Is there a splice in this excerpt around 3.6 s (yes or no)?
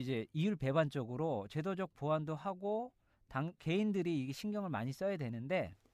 yes